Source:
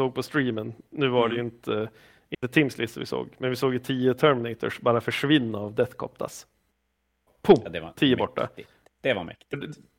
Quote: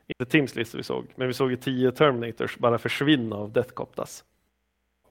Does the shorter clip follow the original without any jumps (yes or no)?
yes